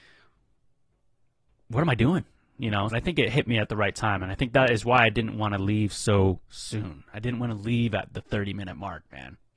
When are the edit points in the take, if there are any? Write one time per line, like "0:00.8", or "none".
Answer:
0:02.9